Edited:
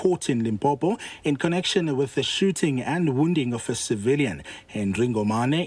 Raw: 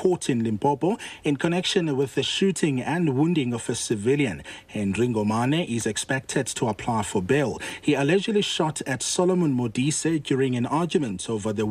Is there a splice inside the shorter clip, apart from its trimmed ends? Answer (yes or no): no